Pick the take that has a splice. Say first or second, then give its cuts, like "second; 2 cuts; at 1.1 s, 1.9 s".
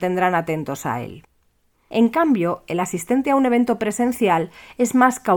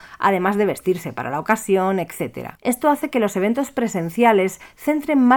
second; 1 cut; at 2.6 s